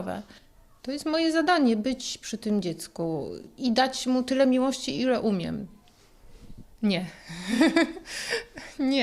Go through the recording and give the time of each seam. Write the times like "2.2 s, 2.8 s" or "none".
6.6 s